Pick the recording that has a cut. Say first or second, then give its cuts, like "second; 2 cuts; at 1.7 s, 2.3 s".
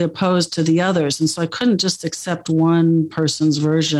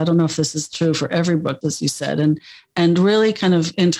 second; 1 cut; at 1.6 s